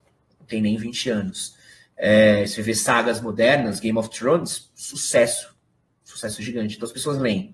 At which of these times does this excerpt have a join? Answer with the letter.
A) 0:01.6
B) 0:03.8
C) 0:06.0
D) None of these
D